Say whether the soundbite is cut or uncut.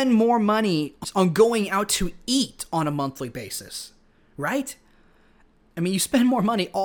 uncut